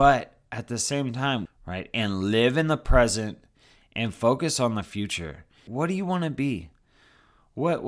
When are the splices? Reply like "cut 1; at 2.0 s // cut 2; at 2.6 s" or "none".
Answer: cut 1; at 1.5 s // cut 2; at 5.7 s